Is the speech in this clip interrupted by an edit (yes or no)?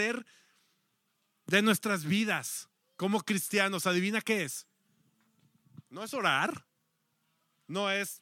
no